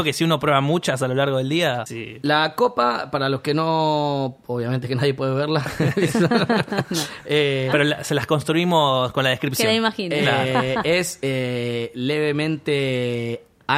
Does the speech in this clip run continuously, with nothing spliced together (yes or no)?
yes